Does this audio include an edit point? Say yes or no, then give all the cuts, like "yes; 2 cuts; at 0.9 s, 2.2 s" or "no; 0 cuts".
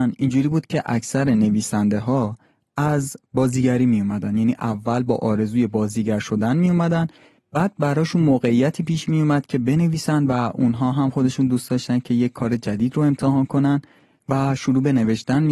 no; 0 cuts